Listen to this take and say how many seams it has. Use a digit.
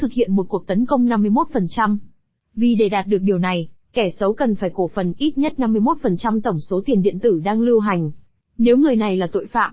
1